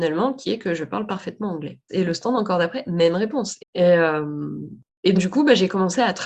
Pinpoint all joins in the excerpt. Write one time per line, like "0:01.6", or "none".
0:01.9
0:03.6
0:05.1